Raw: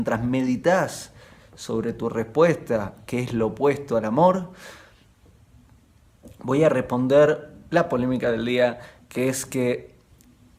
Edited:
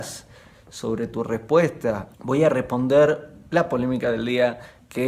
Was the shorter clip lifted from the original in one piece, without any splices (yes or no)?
no